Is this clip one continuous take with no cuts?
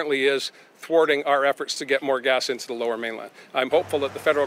yes; 0 cuts

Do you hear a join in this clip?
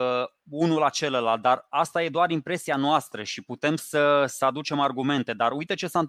no; 0 cuts

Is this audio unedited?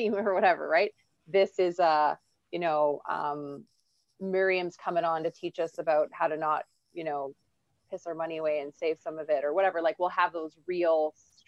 yes; 0 cuts

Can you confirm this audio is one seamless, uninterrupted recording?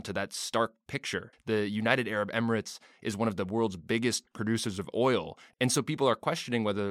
no; 1 cut; at 1.3 s

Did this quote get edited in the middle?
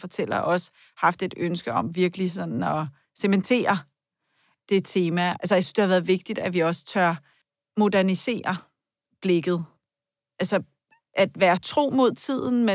no; 0 cuts

